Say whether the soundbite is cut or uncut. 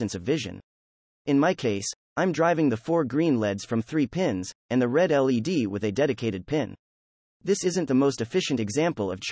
uncut